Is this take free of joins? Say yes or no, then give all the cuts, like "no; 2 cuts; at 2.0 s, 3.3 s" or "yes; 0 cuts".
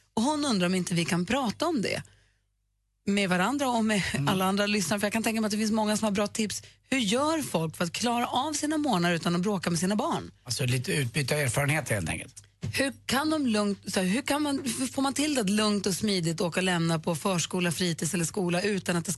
yes; 0 cuts